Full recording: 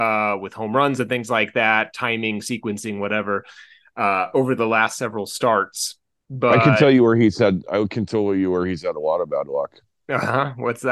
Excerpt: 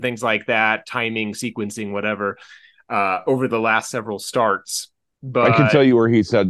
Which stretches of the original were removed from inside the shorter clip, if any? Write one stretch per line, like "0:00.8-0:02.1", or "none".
none